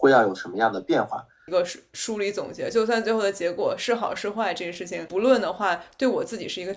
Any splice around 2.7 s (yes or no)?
no